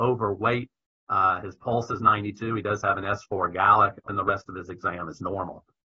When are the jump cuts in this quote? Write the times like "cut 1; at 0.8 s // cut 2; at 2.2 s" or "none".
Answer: cut 1; at 4.1 s